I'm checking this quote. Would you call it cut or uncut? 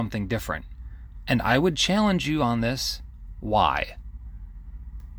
uncut